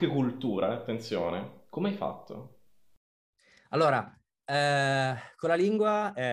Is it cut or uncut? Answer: uncut